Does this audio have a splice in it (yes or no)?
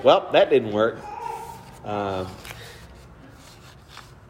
no